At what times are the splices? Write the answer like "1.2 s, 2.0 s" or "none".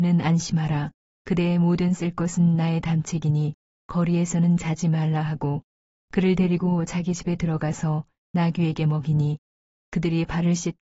none